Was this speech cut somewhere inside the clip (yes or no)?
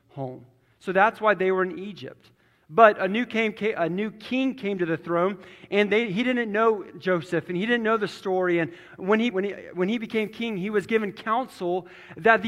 yes